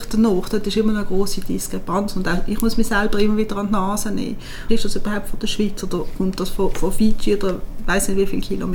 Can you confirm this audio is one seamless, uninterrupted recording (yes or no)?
no